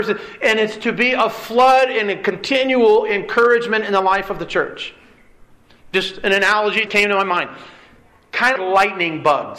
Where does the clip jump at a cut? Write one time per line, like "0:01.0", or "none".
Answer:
0:06.9
0:08.6